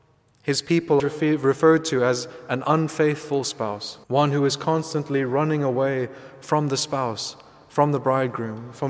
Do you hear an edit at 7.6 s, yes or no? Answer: no